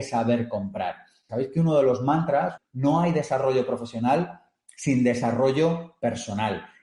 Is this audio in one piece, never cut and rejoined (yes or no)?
no